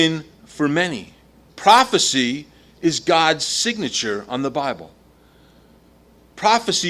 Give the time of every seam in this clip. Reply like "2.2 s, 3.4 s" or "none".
1.5 s

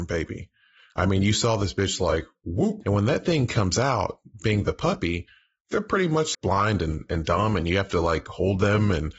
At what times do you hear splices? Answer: 2.8 s, 6.3 s

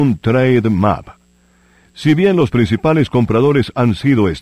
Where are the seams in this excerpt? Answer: none

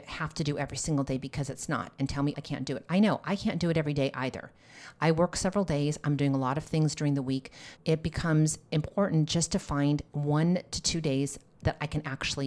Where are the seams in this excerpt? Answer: 2.3 s, 7.8 s

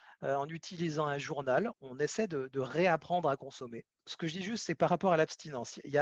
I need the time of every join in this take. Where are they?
1.7 s, 4.0 s

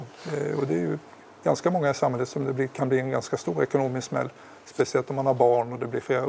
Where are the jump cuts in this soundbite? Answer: none

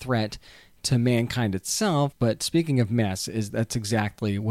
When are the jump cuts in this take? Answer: 2.1 s, 3.5 s

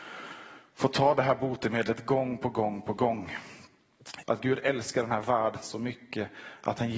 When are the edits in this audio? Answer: 4.2 s

